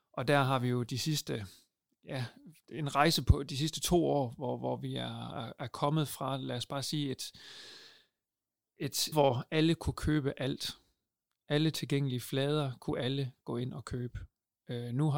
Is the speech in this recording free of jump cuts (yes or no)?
no